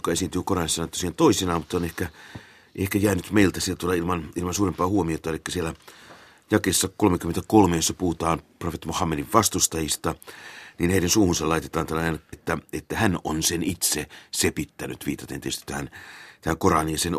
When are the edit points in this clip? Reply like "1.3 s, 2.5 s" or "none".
12.3 s

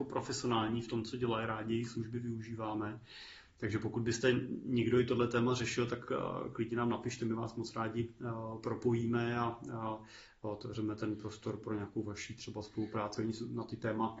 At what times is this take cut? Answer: none

